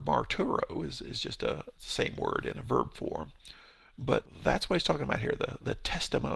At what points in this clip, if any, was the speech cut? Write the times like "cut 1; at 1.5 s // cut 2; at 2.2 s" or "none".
cut 1; at 1.8 s

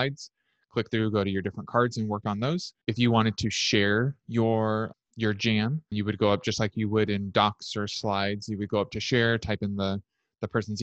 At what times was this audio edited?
cut 1; at 2.8 s // cut 2; at 5.9 s

